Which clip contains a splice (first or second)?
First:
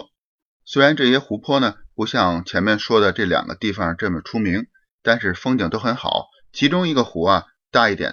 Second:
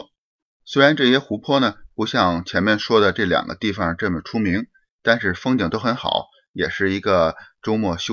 first